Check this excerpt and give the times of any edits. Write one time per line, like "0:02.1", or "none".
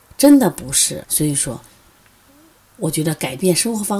0:01.0